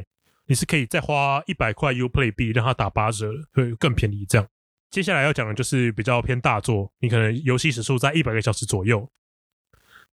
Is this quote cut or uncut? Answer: uncut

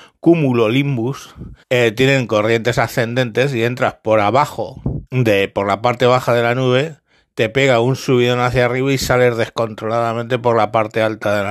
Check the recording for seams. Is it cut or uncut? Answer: cut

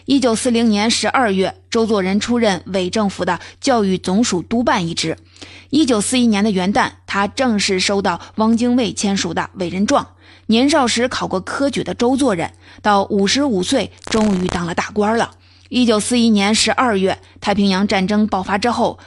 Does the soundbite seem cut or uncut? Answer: uncut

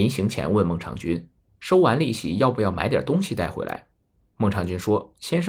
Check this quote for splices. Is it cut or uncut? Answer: uncut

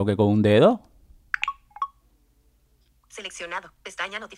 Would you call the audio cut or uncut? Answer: uncut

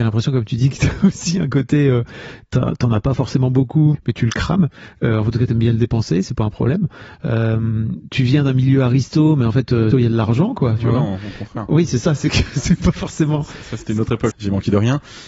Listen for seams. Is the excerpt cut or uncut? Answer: cut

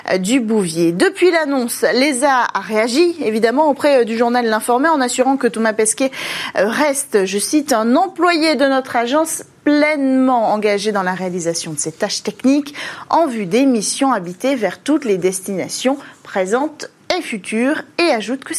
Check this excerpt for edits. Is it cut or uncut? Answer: uncut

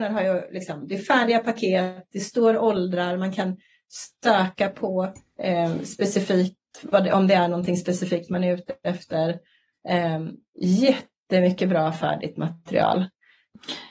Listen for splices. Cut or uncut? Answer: uncut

